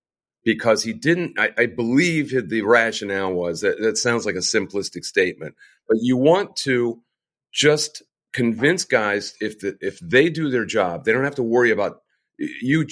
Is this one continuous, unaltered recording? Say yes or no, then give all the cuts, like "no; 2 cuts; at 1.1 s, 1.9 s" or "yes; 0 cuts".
yes; 0 cuts